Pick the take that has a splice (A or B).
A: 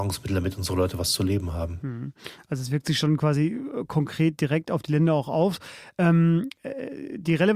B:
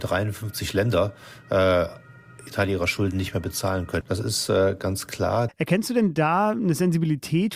B